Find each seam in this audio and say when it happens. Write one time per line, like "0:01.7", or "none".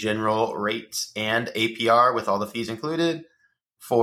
none